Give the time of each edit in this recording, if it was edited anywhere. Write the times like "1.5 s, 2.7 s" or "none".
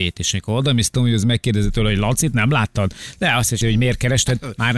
3.6 s